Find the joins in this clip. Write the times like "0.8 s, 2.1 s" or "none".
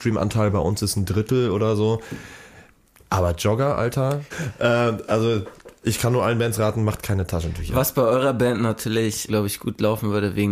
4.3 s, 9.3 s